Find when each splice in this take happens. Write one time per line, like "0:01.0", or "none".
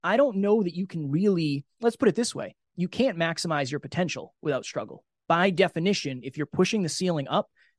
none